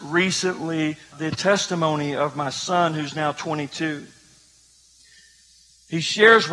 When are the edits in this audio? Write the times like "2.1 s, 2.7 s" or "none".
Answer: 1.1 s